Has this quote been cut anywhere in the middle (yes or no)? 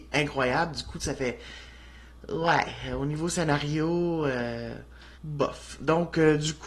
yes